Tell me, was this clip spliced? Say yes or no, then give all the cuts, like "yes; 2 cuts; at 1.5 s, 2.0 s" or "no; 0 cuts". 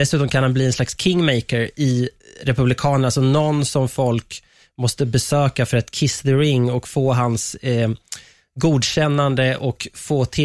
no; 0 cuts